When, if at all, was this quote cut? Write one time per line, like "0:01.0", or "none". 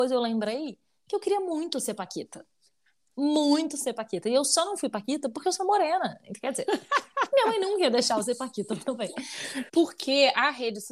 0:09.7